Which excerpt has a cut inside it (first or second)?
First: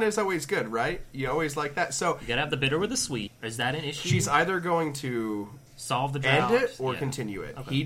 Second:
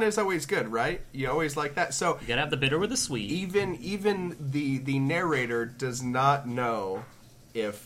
first